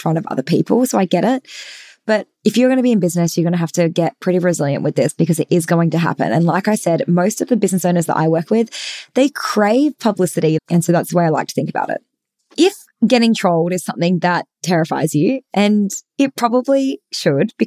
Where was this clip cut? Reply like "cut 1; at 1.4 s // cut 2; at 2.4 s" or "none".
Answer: cut 1; at 10.6 s